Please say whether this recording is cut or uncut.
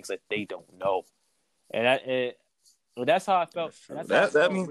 uncut